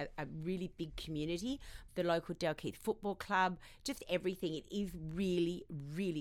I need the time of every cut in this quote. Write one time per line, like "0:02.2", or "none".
0:01.9